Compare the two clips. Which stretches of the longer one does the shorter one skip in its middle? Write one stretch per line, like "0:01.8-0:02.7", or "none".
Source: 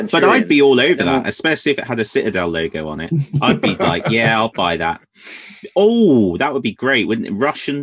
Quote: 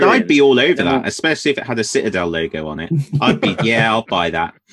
0:03.8-0:04.0